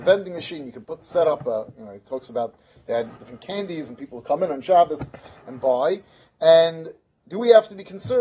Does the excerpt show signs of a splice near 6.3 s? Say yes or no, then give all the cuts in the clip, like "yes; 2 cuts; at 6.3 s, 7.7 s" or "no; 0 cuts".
no; 1 cut; at 3.2 s